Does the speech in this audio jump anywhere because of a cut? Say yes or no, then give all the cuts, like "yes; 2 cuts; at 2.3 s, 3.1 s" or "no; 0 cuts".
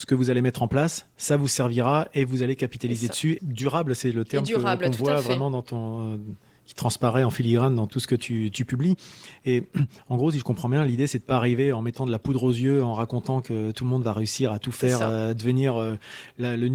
yes; 1 cut; at 3.4 s